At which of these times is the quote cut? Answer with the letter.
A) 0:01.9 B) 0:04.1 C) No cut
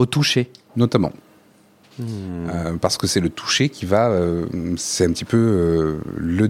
A